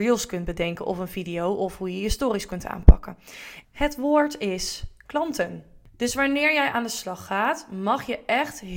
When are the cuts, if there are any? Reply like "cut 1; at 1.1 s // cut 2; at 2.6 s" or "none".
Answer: cut 1; at 3.6 s